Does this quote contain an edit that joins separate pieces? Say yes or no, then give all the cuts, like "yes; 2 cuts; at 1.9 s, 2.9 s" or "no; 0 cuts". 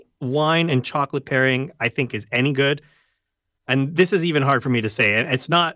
no; 0 cuts